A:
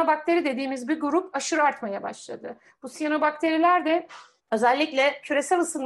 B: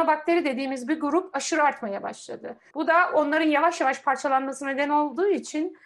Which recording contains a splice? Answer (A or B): B